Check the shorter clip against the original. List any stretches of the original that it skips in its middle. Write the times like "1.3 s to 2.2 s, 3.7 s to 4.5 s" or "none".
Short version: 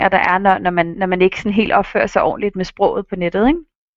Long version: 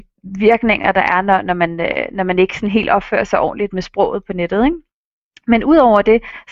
1.8 s to 2.1 s